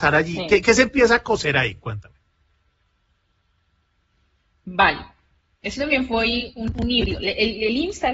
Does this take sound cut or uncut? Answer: uncut